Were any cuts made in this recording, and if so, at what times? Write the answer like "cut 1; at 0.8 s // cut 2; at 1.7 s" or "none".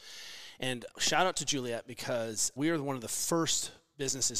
cut 1; at 0.9 s // cut 2; at 2.6 s